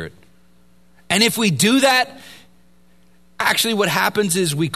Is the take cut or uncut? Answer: uncut